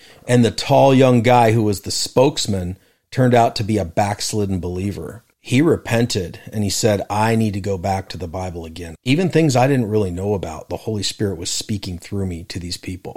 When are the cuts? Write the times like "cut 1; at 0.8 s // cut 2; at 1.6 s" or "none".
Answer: cut 1; at 5.3 s // cut 2; at 8.9 s

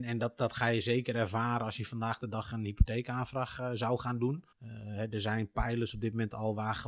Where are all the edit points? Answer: cut 1; at 4.5 s

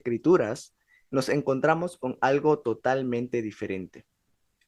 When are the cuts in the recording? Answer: none

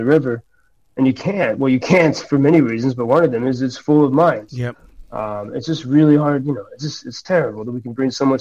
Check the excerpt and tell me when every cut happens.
none

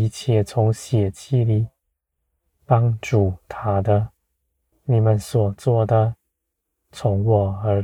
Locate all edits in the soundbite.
cut 1; at 4.7 s

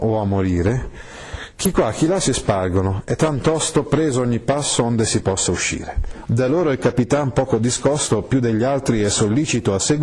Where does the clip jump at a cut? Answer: cut 1; at 6.3 s

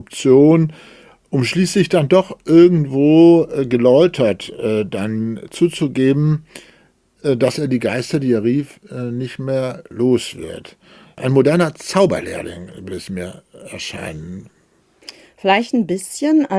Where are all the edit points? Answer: none

